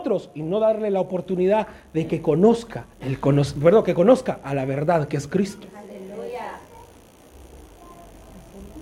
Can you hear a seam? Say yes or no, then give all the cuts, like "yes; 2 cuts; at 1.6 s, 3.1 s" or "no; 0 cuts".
yes; 1 cut; at 2.9 s